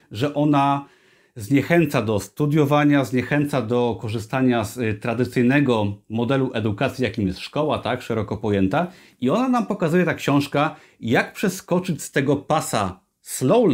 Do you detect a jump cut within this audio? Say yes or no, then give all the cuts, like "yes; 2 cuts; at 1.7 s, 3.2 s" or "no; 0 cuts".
no; 0 cuts